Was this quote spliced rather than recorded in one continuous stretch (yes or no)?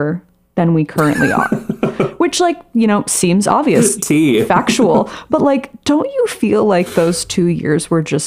no